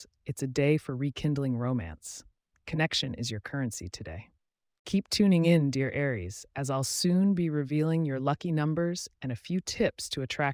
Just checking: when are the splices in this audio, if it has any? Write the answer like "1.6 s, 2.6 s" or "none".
2.5 s